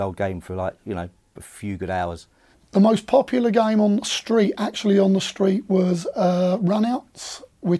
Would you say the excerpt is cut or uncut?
cut